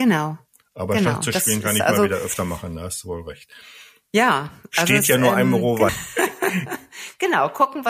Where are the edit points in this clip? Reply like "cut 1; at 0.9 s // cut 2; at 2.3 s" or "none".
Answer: cut 1; at 5.9 s